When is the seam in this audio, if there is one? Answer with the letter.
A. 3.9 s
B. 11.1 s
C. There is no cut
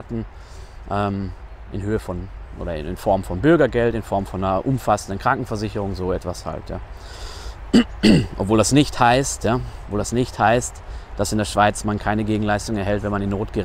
C